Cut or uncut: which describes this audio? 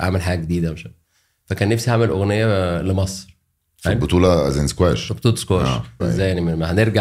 cut